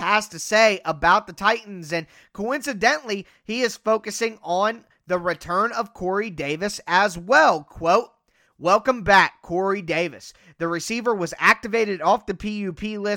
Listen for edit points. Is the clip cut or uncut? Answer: uncut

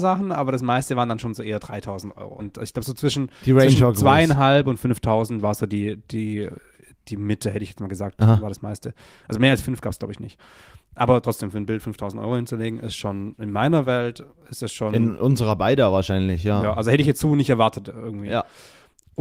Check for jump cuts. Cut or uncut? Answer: cut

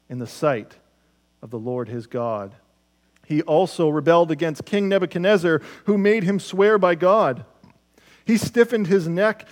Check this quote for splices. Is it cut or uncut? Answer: cut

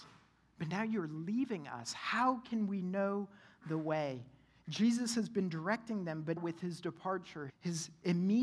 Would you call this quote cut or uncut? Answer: cut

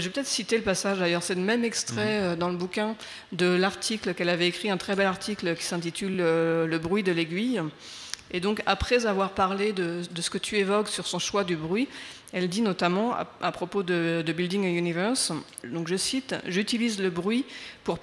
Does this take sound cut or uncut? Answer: uncut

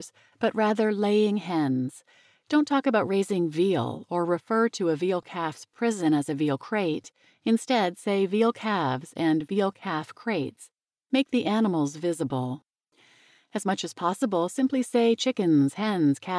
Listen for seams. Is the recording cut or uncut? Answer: uncut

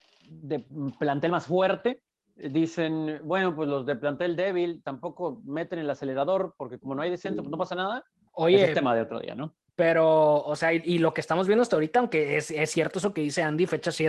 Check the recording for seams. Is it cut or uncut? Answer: cut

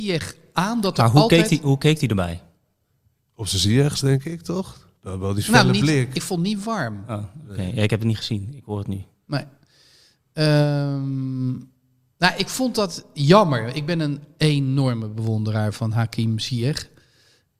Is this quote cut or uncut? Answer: uncut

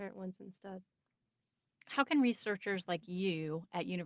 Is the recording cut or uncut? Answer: uncut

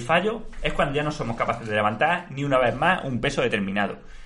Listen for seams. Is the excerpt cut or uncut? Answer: uncut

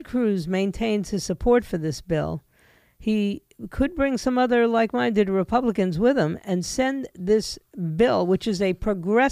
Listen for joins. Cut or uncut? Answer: uncut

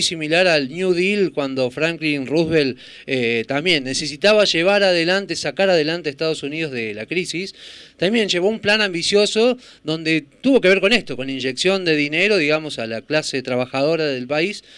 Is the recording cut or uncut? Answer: uncut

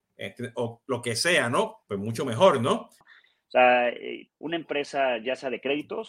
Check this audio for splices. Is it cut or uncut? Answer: cut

